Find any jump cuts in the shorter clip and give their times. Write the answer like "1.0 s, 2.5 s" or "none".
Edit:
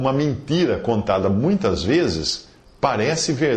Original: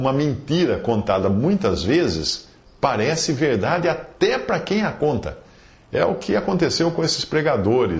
none